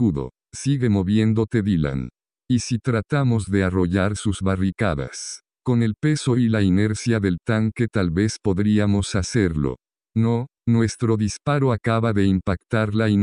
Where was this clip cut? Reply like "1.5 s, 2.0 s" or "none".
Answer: 10.6 s